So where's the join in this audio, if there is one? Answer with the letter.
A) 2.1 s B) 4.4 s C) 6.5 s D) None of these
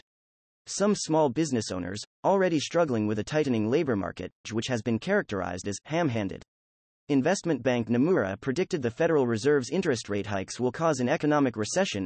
B